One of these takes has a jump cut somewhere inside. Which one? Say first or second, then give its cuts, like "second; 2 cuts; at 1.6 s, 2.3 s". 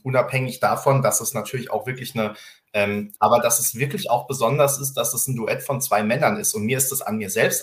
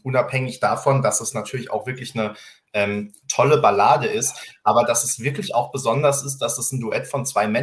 first; 1 cut; at 3.2 s